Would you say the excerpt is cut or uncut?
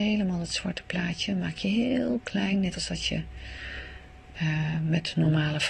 uncut